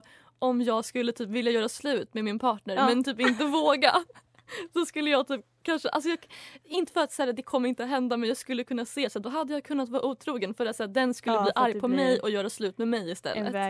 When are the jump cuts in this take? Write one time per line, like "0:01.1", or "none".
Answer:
none